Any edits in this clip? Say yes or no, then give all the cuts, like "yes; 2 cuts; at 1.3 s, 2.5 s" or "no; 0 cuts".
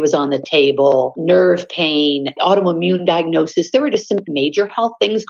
no; 0 cuts